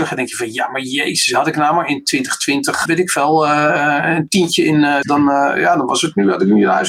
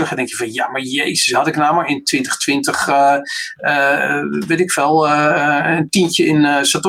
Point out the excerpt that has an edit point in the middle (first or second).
first